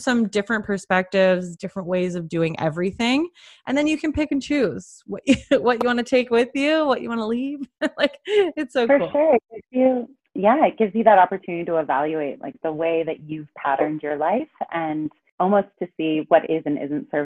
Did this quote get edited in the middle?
no; 0 cuts

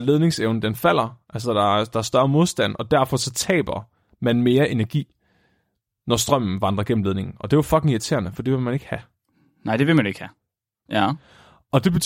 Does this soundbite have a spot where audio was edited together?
yes; 1 cut; at 10.9 s

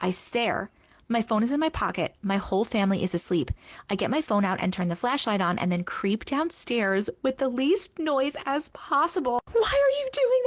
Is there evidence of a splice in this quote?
no; 0 cuts

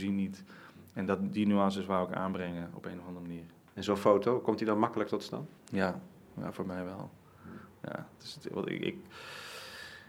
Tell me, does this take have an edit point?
yes; 1 cut; at 5.6 s

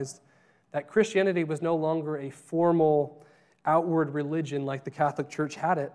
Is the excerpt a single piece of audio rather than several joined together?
yes; 0 cuts

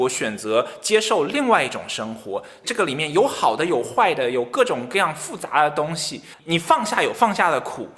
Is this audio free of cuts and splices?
yes; 0 cuts

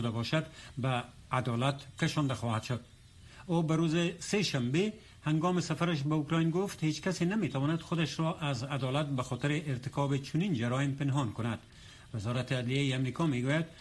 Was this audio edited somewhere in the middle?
no; 0 cuts

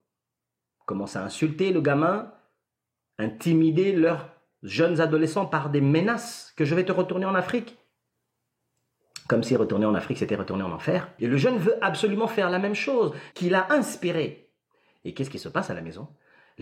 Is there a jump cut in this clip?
yes; 2 cuts; at 11.2 s, 13.3 s

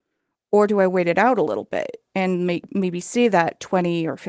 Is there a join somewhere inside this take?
no; 0 cuts

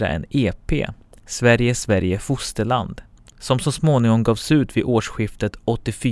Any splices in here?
no; 0 cuts

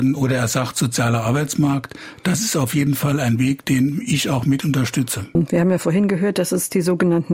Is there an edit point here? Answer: no; 0 cuts

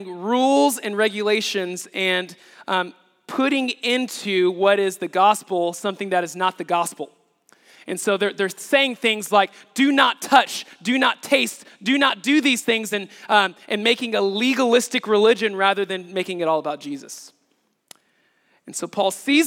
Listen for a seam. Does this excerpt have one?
no; 0 cuts

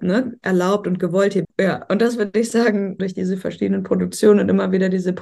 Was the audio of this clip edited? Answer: yes; 2 cuts; at 1.4 s, 3.0 s

